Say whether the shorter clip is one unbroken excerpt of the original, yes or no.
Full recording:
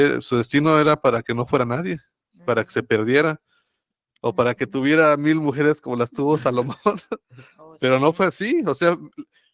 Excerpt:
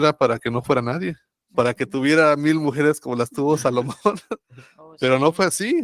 no